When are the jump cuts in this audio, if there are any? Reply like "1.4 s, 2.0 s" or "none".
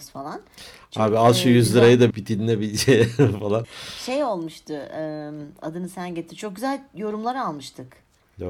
2.1 s, 3.6 s